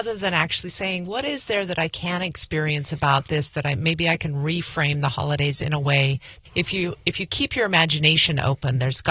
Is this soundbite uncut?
yes; 0 cuts

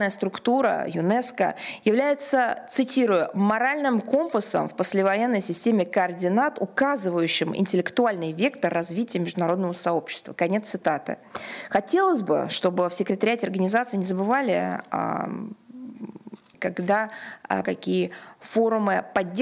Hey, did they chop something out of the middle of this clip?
yes; 2 cuts; at 16.5 s, 17.6 s

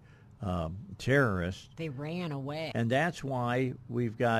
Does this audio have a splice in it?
yes; 1 cut; at 2.7 s

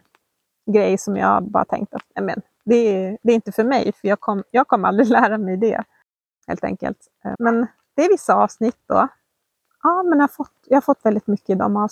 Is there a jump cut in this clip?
yes; 2 cuts; at 7.3 s, 9.6 s

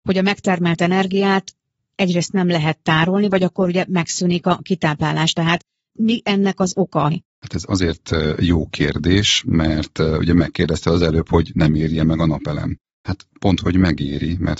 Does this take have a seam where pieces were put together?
yes; 1 cut; at 7.1 s

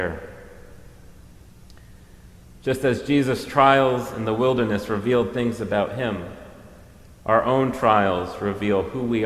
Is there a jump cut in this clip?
no; 0 cuts

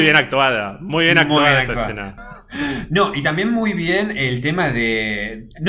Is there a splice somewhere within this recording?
yes; 1 cut; at 2.2 s

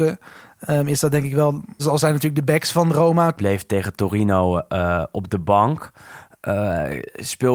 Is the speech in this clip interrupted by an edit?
yes; 2 cuts; at 1.8 s, 3.4 s

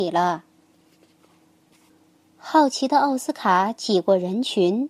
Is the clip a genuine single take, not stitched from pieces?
yes; 0 cuts

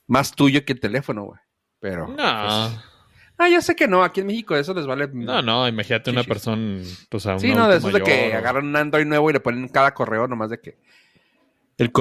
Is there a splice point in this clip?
no; 0 cuts

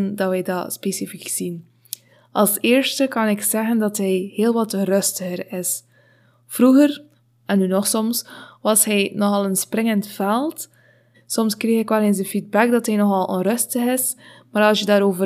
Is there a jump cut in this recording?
yes; 1 cut; at 11.1 s

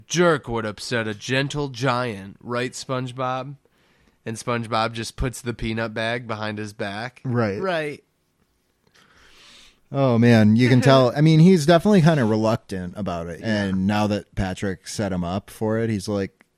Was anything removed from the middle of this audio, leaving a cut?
yes; 2 cuts; at 11.1 s, 13.4 s

